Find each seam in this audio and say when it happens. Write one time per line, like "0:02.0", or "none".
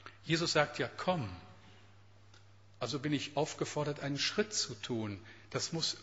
none